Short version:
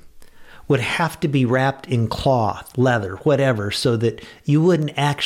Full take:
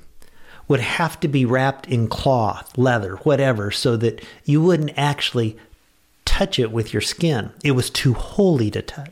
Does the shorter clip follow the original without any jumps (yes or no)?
yes